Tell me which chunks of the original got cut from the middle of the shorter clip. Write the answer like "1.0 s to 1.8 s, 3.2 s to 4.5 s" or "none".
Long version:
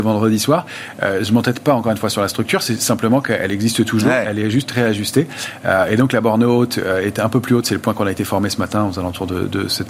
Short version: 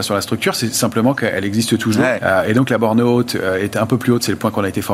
4.2 s to 5.6 s